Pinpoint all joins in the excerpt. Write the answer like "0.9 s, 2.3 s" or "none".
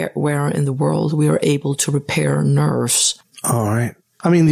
3.2 s